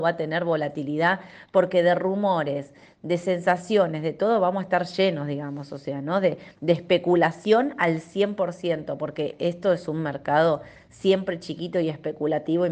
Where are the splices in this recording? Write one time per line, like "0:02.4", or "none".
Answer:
none